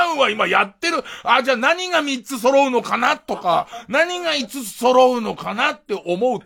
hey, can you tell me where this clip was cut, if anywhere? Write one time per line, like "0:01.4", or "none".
none